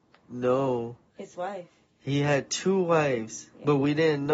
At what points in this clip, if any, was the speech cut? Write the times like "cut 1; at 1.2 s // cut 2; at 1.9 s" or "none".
none